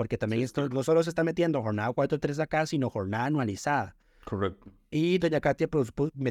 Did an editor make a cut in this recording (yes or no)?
no